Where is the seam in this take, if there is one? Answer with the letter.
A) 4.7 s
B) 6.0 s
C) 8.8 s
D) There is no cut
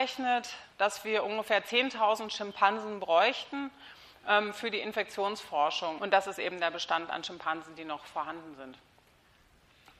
B